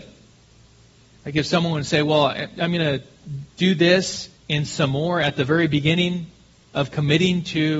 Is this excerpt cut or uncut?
cut